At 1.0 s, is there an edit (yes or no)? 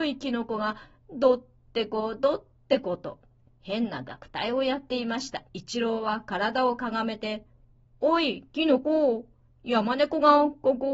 no